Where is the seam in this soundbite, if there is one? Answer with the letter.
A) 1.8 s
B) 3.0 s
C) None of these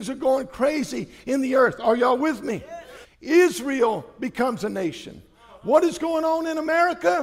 B